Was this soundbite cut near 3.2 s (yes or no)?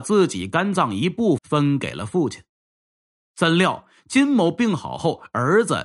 no